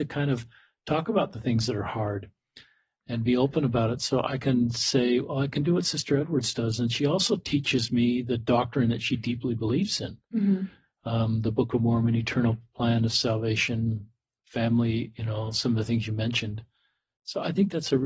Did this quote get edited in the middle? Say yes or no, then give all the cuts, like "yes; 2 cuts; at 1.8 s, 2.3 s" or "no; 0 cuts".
no; 0 cuts